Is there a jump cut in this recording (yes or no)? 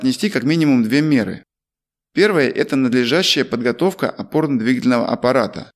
no